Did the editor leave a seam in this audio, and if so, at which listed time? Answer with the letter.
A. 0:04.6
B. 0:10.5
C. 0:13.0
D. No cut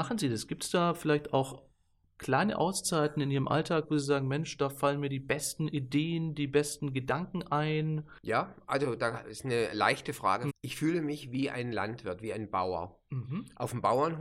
B